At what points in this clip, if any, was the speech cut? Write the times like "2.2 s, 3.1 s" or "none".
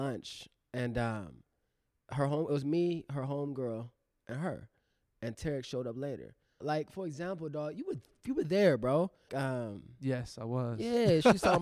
6.6 s, 9.3 s